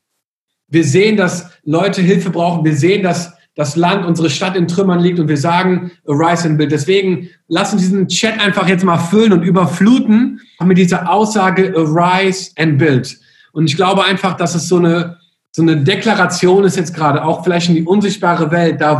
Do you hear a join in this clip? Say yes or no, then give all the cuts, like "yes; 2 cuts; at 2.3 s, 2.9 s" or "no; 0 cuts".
yes; 1 cut; at 10.6 s